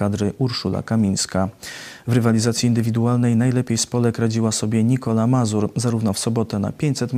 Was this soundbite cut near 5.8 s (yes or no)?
no